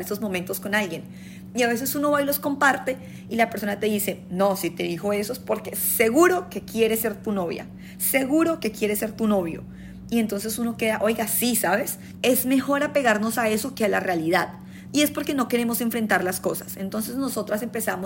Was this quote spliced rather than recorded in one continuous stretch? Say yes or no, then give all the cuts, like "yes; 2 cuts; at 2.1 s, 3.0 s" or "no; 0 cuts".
yes; 1 cut; at 12.2 s